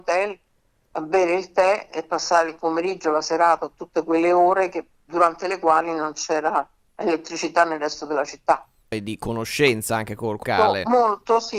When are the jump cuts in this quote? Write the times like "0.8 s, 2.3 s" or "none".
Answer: 8.9 s, 10.4 s